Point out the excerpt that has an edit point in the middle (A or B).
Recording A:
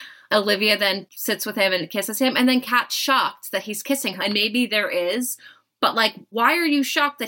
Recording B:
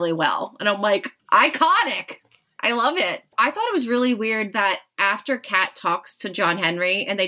A